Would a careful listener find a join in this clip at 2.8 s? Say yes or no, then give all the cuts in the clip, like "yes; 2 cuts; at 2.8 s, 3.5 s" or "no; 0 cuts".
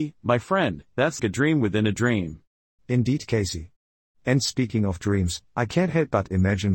yes; 2 cuts; at 1.2 s, 2.8 s